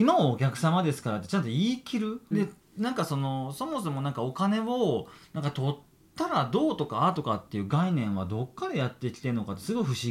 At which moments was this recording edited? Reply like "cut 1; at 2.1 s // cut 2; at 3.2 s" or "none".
cut 1; at 2.3 s